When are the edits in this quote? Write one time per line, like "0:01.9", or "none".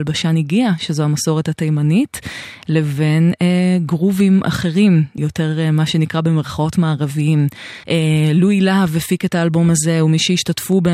0:05.2
0:07.8